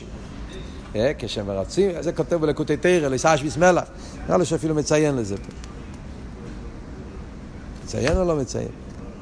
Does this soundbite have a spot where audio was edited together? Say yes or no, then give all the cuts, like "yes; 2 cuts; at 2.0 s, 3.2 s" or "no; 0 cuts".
yes; 1 cut; at 2.0 s